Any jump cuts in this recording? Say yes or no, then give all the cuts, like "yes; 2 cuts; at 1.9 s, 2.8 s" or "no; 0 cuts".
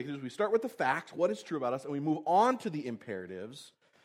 no; 0 cuts